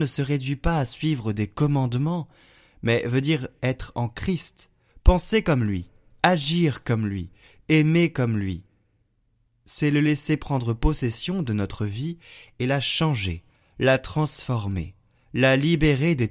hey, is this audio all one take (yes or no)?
yes